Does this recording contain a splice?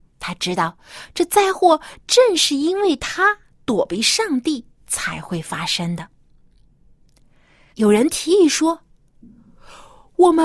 yes; 1 cut; at 7.7 s

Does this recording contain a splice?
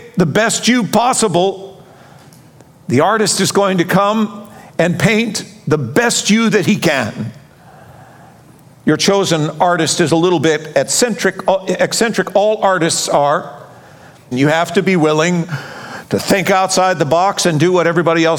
yes; 1 cut; at 14.3 s

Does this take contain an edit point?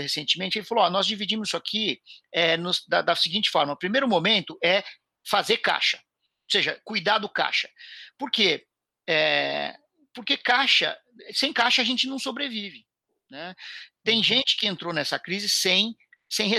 no; 0 cuts

